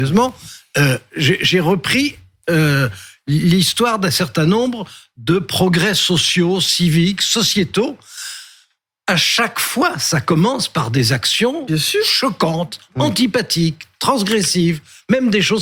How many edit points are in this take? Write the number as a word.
zero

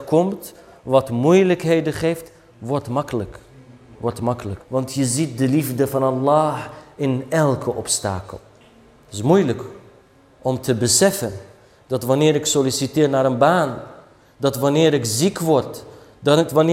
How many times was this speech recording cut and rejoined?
one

